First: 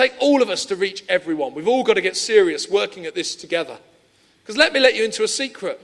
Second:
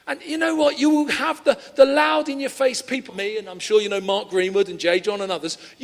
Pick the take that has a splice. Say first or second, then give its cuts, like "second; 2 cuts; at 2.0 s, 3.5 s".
second; 1 cut; at 3.1 s